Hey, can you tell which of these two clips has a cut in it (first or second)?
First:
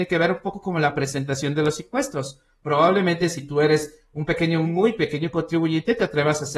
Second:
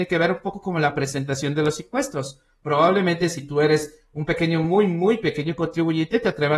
first